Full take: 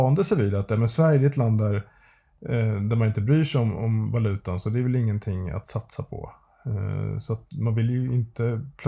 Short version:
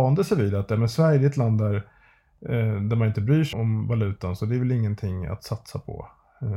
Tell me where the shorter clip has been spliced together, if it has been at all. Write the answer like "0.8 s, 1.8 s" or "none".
3.5 s